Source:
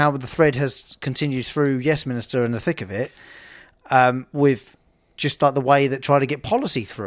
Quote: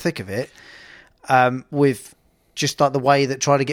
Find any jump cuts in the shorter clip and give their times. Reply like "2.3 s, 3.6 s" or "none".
none